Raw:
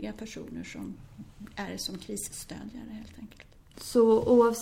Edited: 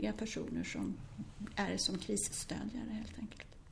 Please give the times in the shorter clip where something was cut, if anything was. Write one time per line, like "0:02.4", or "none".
none

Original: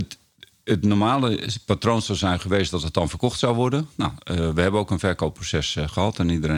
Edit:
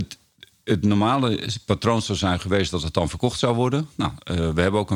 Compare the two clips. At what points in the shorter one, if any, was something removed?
none

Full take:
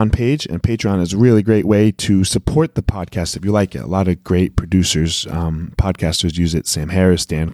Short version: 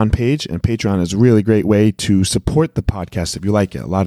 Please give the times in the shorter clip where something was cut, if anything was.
none

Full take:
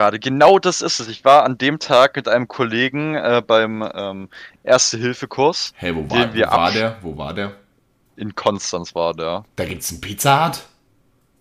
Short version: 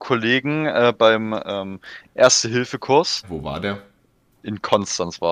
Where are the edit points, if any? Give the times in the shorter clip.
0:03.2

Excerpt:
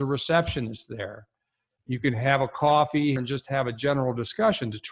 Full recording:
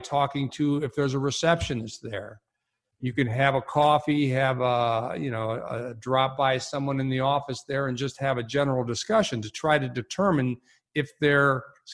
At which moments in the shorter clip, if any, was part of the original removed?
0:03.2

